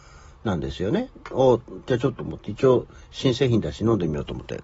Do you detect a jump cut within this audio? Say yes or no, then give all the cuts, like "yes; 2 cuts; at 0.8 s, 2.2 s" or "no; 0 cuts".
yes; 1 cut; at 2.2 s